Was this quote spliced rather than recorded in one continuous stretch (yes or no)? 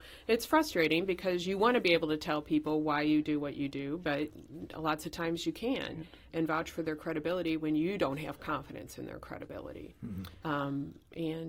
yes